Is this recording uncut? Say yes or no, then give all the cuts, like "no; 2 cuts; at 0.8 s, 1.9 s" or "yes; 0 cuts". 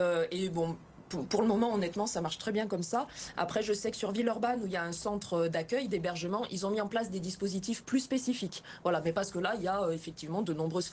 yes; 0 cuts